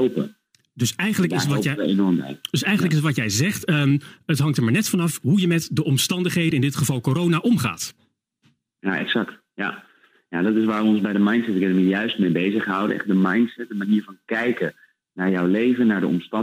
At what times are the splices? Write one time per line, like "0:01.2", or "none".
none